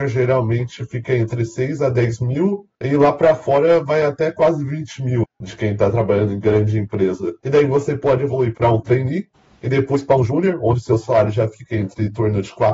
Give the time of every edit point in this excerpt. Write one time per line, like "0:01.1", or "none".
0:05.2
0:07.4